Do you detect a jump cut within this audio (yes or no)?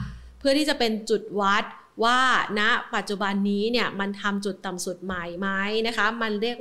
no